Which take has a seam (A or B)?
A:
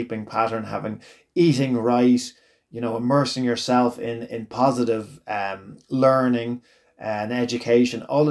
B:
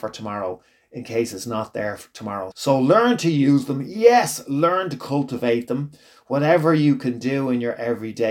B